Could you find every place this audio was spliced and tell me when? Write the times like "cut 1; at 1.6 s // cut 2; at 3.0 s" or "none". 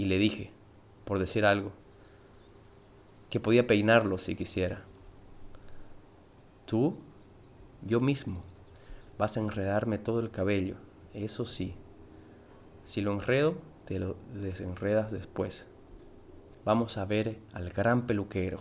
cut 1; at 16.6 s